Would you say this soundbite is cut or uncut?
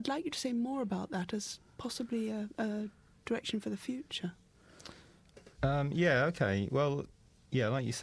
cut